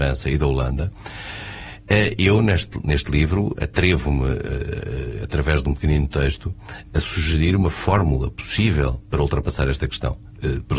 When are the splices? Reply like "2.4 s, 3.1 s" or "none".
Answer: none